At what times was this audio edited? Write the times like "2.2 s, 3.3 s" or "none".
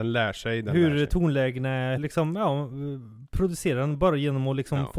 2.0 s